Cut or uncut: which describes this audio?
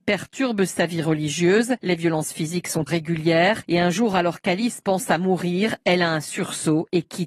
cut